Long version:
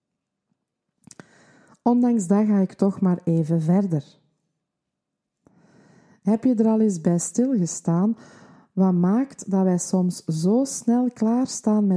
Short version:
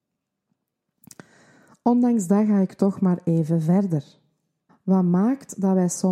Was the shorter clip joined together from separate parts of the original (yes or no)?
yes